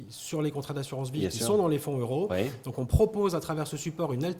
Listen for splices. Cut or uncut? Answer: uncut